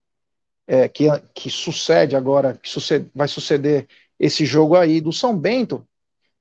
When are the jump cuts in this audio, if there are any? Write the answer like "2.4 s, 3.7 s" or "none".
5.0 s